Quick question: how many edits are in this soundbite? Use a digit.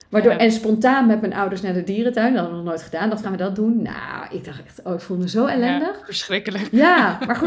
1